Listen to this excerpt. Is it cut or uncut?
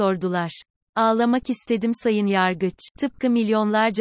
cut